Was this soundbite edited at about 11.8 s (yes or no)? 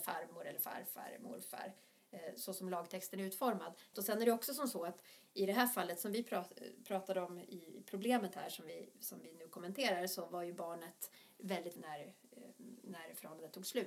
yes